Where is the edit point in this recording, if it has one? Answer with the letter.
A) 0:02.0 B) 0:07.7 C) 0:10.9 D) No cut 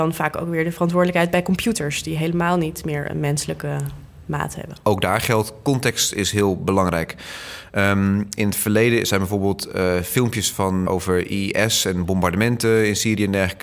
C